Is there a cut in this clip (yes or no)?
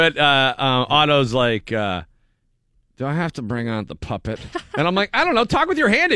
no